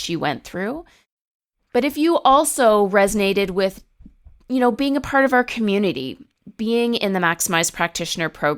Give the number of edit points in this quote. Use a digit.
0